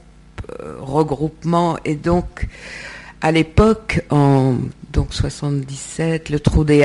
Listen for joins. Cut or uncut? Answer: uncut